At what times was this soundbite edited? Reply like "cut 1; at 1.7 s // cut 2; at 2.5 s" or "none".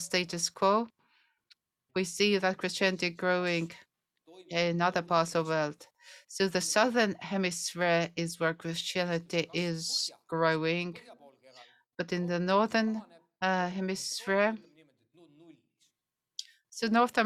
cut 1; at 1.9 s